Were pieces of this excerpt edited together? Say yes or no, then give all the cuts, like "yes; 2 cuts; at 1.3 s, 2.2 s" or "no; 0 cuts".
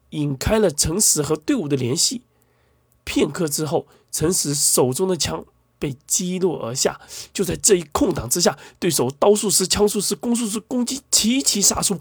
no; 0 cuts